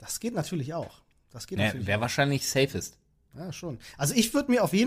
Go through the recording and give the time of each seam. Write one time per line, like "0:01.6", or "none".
none